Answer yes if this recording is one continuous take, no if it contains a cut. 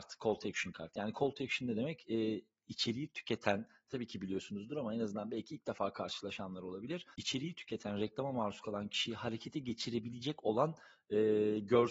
no